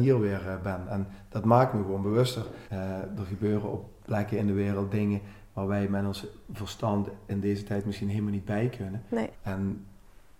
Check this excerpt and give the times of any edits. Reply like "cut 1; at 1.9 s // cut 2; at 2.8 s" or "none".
cut 1; at 2.7 s // cut 2; at 9.3 s